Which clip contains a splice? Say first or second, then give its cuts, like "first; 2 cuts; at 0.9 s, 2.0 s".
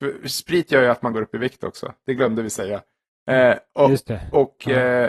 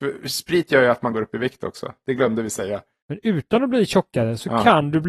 second; 1 cut; at 3.0 s